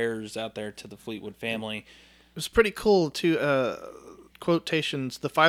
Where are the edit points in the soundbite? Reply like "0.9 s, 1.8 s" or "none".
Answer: 4.3 s